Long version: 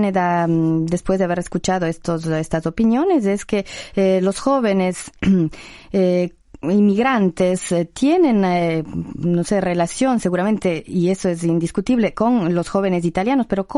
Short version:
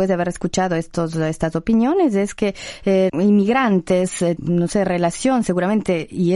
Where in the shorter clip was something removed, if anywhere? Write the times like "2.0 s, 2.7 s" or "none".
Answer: 3.1 s, 4.4 s